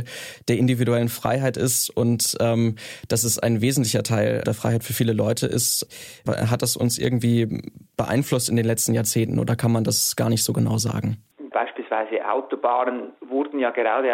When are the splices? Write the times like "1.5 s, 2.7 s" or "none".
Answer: 6.3 s, 11.5 s

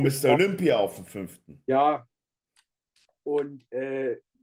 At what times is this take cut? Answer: none

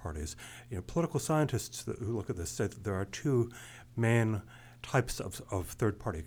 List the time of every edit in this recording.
none

